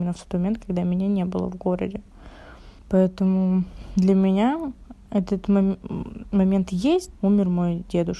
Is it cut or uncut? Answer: cut